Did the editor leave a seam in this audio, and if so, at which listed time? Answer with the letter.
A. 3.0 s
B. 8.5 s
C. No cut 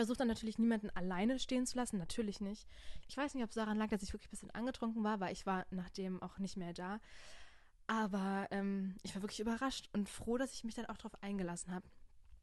A